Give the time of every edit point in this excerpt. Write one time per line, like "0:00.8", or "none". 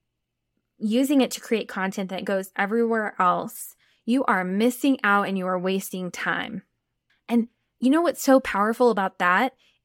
0:07.1